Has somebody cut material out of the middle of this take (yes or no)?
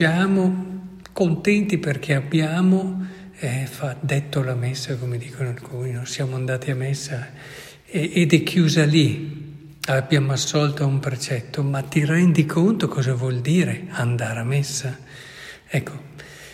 no